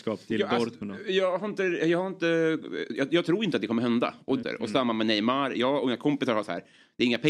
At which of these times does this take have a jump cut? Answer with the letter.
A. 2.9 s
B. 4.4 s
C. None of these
B